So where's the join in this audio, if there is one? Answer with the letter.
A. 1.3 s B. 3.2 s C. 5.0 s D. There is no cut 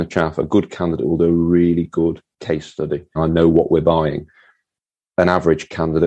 B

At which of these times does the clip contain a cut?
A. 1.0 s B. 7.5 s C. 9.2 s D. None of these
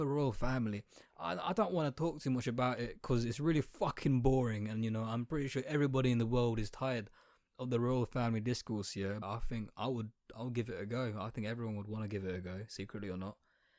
C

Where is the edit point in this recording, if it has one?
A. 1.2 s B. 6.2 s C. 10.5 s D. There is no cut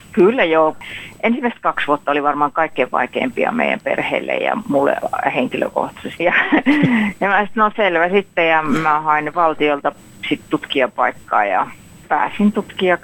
B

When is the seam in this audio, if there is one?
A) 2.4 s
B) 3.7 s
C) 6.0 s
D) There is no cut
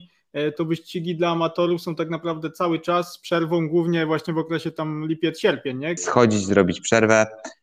C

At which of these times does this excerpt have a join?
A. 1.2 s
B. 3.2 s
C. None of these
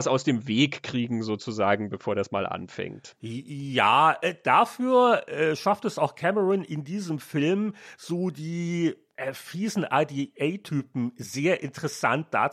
C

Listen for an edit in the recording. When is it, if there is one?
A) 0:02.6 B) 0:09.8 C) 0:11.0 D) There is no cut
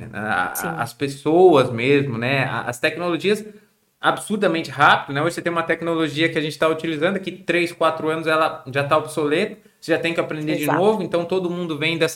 D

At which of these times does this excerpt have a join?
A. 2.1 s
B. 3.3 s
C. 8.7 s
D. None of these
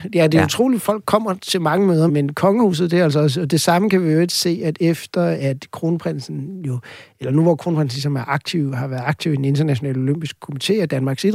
A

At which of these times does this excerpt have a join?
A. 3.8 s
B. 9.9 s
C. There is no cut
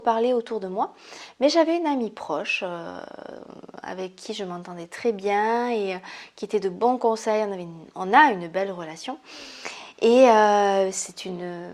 C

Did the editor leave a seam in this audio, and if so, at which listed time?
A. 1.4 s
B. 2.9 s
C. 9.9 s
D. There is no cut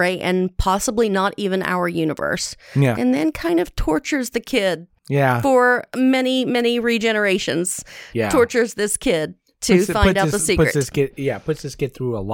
B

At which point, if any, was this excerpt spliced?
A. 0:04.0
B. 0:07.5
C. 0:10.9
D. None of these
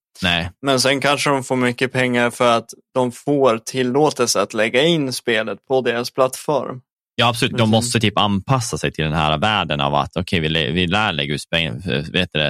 B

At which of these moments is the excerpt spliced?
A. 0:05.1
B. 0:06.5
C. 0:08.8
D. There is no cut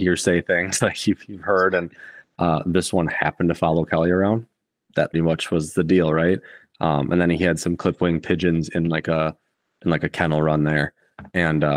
A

